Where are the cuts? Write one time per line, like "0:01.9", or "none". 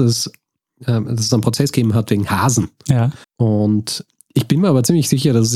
0:03.2